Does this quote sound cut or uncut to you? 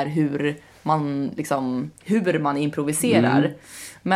cut